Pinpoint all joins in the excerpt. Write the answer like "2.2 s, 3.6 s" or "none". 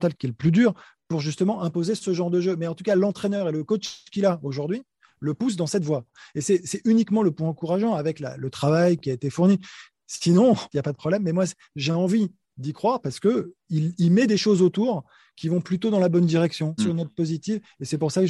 10.7 s, 16.8 s